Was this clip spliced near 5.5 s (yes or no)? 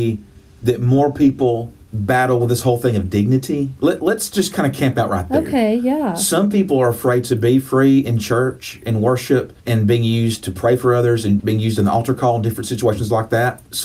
no